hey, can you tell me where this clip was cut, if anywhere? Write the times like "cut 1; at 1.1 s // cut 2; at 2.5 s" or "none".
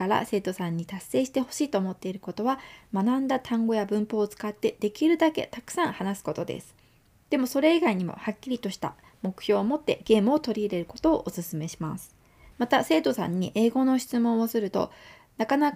cut 1; at 12.5 s